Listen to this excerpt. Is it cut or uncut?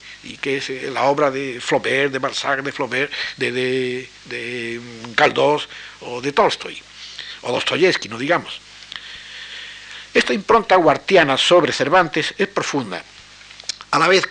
cut